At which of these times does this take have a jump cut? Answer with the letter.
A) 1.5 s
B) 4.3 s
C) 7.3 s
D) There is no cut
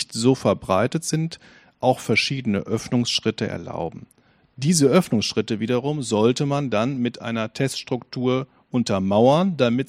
D